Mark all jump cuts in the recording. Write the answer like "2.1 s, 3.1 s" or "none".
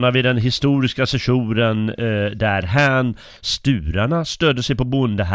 3.4 s